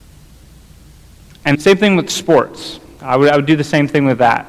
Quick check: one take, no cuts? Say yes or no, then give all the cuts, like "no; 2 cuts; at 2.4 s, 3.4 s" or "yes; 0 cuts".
no; 1 cut; at 1.5 s